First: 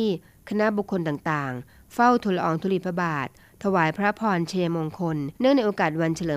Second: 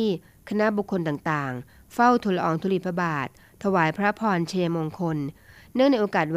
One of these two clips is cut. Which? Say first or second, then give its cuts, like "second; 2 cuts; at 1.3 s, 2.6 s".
first; 1 cut; at 5.4 s